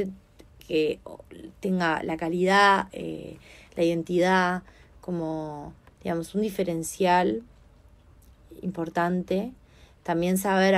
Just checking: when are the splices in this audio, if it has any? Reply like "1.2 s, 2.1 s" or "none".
2.9 s